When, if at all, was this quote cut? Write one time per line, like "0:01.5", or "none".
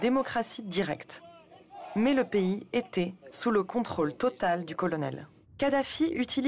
0:03.3